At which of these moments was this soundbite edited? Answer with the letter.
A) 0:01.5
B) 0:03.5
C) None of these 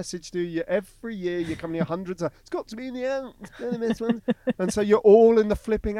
B